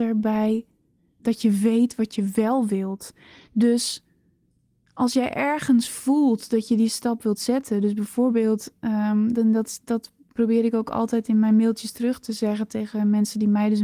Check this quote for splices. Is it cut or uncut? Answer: uncut